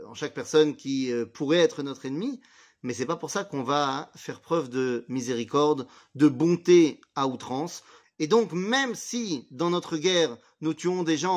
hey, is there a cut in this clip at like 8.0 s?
yes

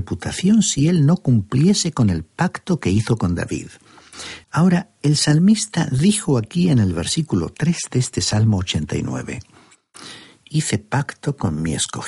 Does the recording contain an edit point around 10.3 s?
no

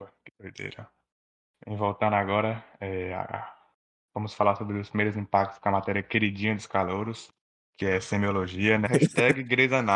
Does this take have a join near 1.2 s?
no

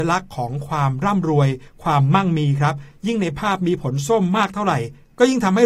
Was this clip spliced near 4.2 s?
no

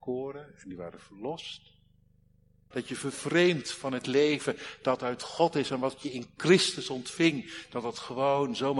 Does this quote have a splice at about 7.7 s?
no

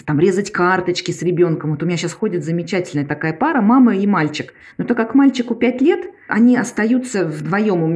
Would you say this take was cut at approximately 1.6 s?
no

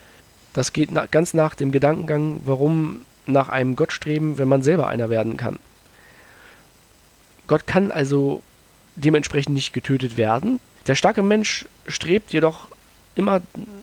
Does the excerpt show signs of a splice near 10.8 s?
yes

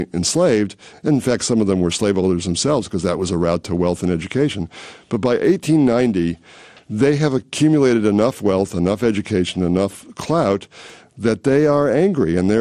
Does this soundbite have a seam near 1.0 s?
no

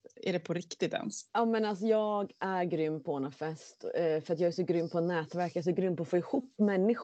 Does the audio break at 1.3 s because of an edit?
yes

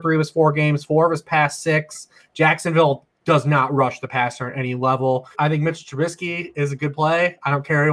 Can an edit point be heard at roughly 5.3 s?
yes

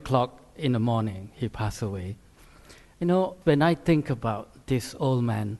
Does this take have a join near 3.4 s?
yes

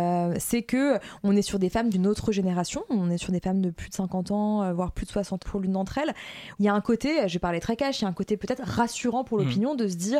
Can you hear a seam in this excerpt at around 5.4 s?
yes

